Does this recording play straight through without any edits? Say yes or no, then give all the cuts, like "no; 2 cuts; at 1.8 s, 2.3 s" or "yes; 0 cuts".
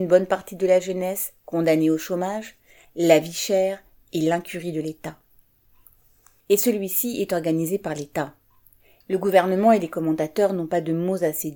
no; 3 cuts; at 2.8 s, 6.4 s, 9.0 s